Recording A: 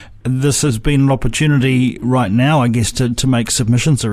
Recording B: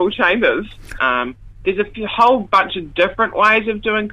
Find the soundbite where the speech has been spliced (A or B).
B